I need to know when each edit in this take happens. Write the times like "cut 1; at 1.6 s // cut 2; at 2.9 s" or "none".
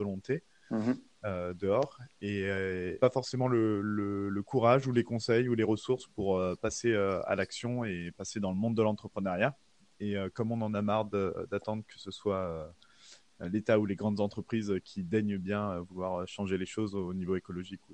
cut 1; at 3.0 s